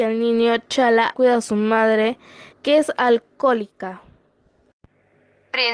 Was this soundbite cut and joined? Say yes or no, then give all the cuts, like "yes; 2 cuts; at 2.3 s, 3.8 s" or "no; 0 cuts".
yes; 2 cuts; at 1.1 s, 2.5 s